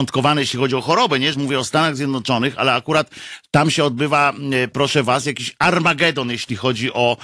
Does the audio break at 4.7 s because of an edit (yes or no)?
no